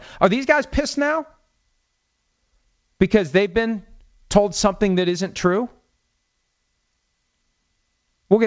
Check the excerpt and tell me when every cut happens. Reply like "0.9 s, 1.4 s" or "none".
none